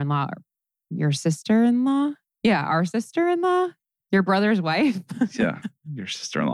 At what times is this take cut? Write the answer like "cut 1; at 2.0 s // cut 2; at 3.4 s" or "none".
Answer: none